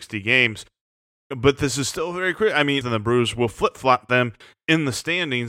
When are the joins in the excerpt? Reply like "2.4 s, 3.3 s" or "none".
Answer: 2.8 s